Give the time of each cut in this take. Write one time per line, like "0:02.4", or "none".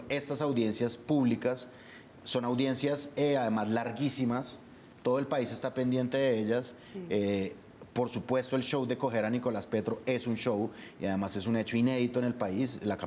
none